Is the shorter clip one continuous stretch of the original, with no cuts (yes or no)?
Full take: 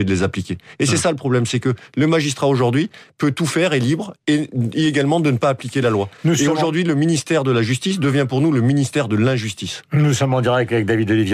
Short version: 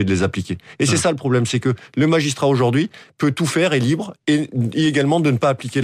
yes